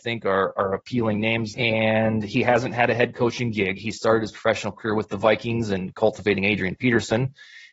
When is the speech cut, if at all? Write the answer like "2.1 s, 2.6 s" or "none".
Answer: 1.5 s